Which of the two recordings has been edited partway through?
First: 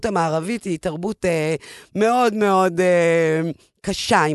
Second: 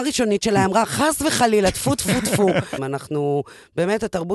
second; 1 cut; at 2.8 s

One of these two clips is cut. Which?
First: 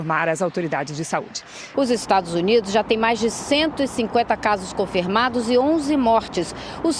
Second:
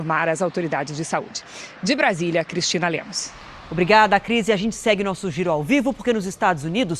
first; 1 cut; at 1.7 s

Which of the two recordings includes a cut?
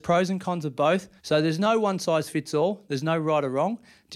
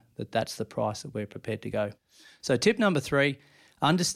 first; 1 cut; at 1.2 s

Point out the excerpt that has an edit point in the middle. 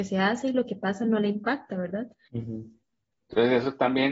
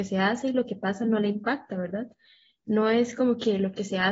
first; 1 cut; at 2.3 s

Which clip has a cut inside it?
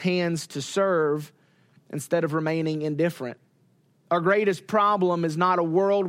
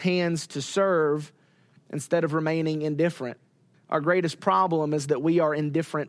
second; 1 cut; at 3.7 s

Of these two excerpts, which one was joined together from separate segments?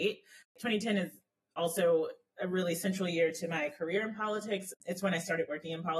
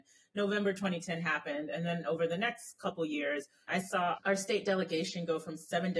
second; 1 cut; at 3.7 s

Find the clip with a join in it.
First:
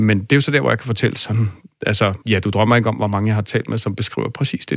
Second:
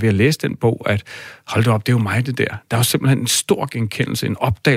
first; 1 cut; at 2.2 s

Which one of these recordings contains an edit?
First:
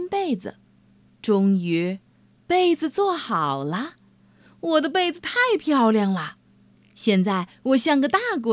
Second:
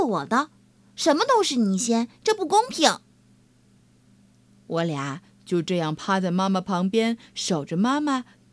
first; 1 cut; at 1.1 s

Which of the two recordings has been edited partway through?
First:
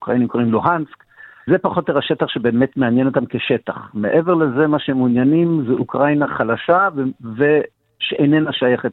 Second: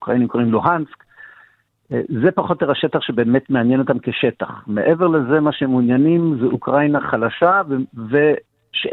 first; 1 cut; at 1.5 s

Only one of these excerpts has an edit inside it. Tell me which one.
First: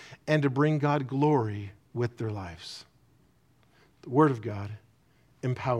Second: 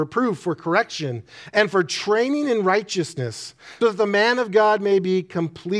second; 1 cut; at 3.8 s

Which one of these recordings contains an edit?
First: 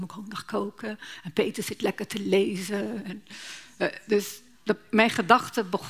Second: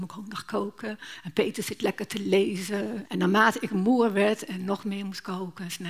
second; 1 cut; at 3.0 s

